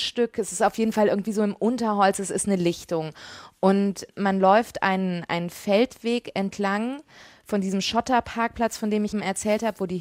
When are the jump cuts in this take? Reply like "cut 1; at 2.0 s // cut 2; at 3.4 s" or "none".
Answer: cut 1; at 4.1 s // cut 2; at 9.1 s

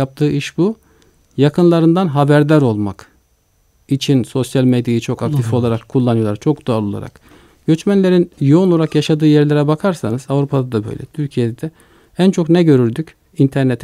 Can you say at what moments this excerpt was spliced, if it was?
none

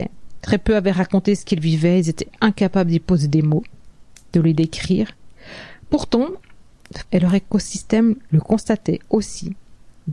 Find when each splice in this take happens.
cut 1; at 7.0 s

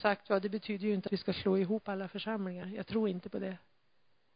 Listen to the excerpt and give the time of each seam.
none

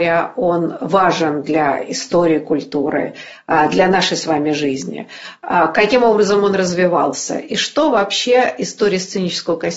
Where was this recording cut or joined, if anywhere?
none

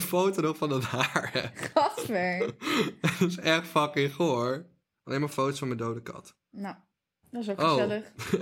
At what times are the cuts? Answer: none

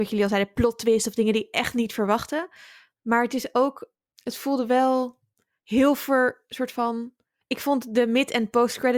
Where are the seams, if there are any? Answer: cut 1; at 4.1 s // cut 2; at 7.4 s

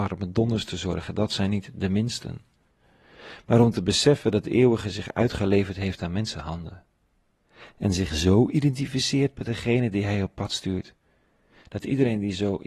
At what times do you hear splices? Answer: none

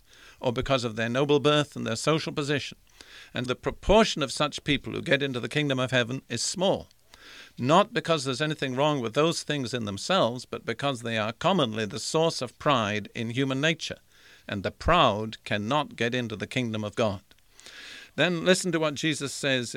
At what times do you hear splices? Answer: cut 1; at 3.4 s

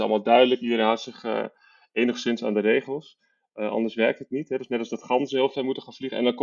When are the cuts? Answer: none

